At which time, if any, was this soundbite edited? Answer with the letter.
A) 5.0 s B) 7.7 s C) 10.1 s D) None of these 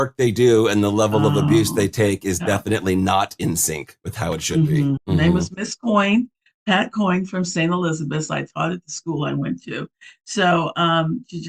A